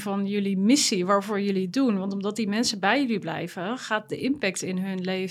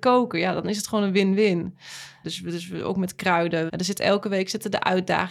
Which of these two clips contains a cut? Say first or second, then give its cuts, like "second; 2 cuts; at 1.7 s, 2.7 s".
second; 2 cuts; at 2.2 s, 3.7 s